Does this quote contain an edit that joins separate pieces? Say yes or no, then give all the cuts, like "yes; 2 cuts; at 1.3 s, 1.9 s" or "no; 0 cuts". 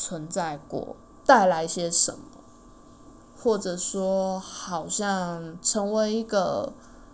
yes; 1 cut; at 1.2 s